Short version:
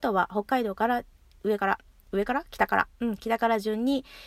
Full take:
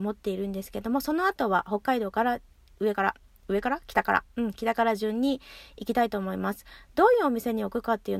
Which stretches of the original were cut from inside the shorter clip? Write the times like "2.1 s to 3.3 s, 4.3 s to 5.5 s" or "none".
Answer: none